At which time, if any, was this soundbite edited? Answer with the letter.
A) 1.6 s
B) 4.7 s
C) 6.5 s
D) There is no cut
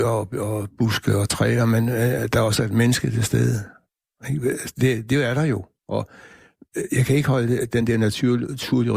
D